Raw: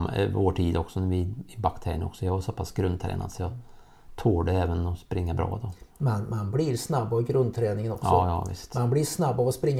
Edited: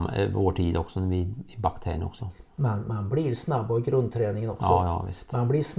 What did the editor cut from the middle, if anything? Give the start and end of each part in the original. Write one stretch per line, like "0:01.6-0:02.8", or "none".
0:02.2-0:05.6